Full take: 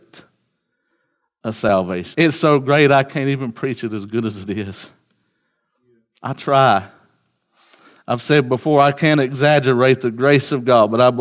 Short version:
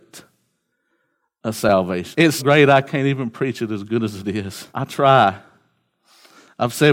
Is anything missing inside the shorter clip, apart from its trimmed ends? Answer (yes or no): yes